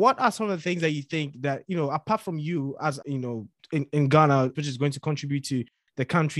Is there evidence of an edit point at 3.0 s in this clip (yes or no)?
yes